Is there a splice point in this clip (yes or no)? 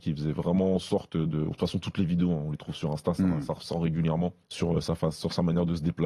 yes